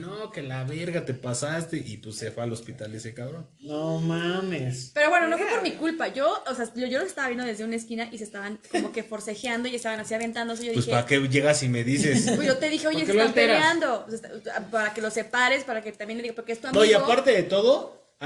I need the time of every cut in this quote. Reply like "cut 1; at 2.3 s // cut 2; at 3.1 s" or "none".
none